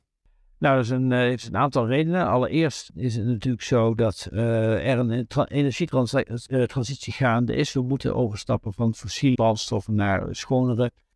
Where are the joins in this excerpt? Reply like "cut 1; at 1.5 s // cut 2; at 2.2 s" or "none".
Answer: cut 1; at 9.3 s